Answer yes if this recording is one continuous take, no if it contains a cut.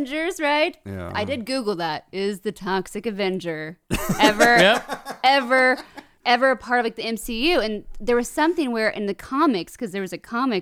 yes